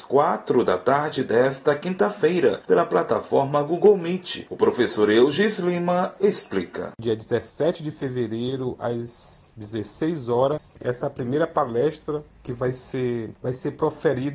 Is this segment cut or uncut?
cut